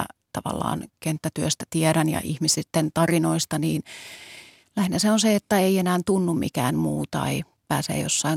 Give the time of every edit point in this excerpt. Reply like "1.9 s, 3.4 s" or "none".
none

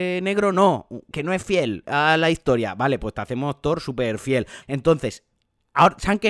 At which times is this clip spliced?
1.1 s, 4.6 s

